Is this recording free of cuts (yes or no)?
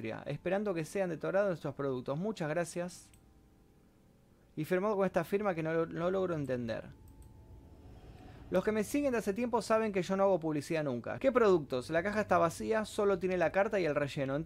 no